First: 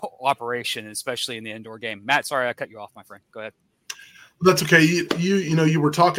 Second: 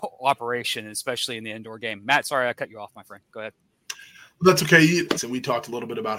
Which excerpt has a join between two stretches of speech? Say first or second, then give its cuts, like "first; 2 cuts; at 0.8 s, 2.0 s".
second; 1 cut; at 5.1 s